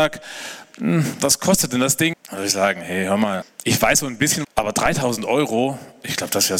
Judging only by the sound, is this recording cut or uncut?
cut